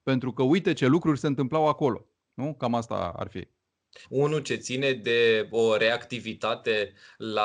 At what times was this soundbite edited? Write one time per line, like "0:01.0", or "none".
0:04.0